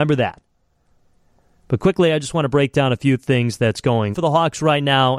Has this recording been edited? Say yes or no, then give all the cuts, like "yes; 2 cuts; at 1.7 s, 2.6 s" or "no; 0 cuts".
yes; 1 cut; at 4.1 s